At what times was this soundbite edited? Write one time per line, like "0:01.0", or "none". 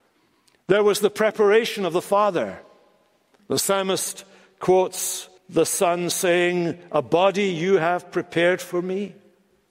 0:03.4
0:05.4